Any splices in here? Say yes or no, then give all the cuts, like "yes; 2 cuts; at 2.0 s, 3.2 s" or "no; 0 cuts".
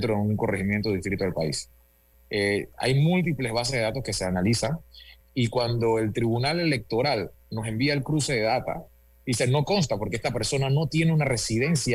yes; 2 cuts; at 2.1 s, 5.2 s